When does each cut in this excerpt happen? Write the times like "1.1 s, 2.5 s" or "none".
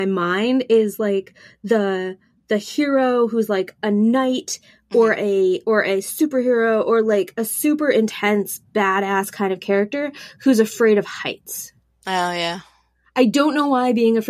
none